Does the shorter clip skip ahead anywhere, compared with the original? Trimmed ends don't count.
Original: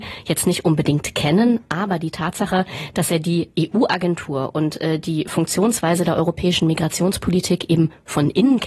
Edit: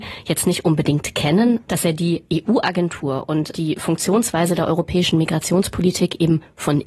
yes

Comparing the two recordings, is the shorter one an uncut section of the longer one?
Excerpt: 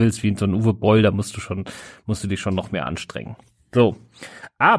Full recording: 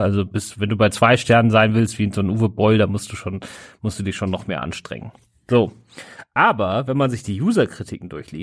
yes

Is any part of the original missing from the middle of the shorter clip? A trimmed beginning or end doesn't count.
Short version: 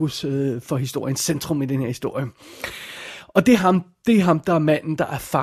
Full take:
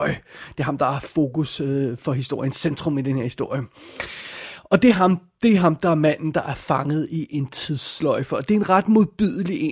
no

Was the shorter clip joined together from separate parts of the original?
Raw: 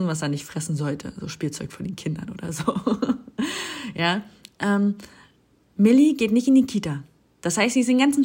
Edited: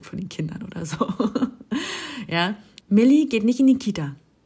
yes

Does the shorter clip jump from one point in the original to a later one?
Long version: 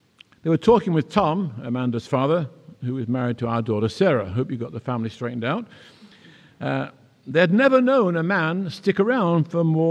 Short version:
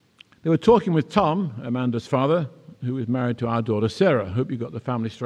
no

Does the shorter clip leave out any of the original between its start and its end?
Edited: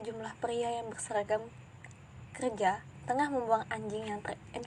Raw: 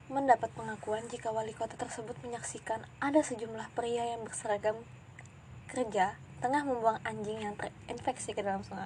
no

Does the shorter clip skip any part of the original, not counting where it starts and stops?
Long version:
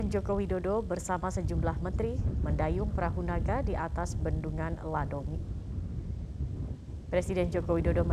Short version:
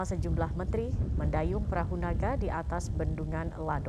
no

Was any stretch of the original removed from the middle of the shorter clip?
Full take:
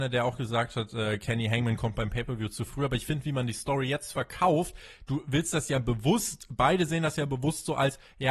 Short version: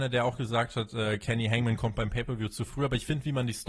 no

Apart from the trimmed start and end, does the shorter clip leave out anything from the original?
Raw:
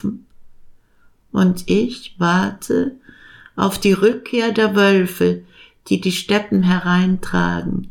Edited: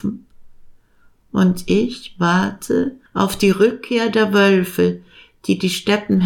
yes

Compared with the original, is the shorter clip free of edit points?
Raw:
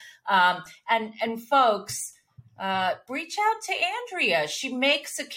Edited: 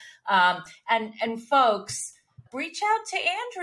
no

